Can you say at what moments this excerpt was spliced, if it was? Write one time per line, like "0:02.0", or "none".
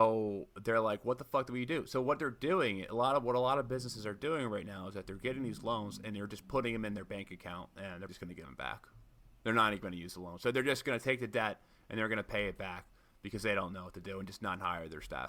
0:08.1